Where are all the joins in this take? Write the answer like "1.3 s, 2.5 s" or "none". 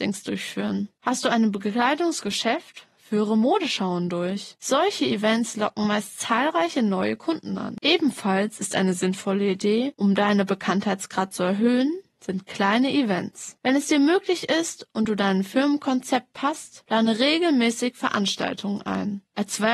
7.8 s